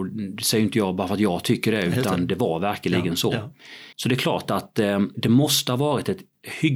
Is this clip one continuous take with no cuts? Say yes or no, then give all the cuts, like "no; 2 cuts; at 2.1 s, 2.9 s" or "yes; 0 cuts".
no; 2 cuts; at 3.9 s, 5.1 s